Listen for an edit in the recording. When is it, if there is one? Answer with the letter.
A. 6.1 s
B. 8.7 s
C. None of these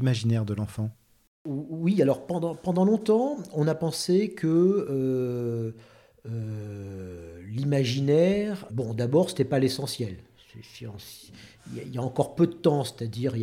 B